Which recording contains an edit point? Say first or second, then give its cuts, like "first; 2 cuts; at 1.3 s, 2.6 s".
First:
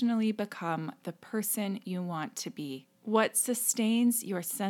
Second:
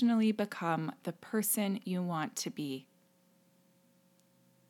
first; 1 cut; at 3.0 s